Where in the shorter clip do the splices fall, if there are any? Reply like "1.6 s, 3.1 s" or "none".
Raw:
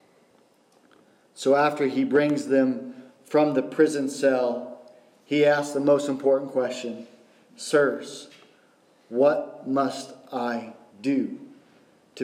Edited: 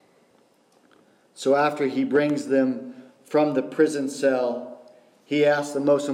none